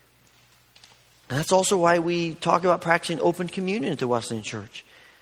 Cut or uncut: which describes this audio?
uncut